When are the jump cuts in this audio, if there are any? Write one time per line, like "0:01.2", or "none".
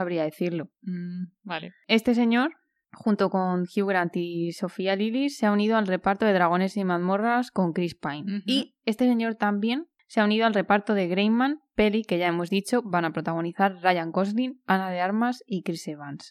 none